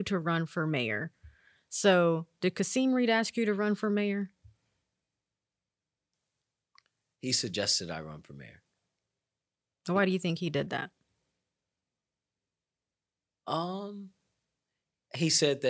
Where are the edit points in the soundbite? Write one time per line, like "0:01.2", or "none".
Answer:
none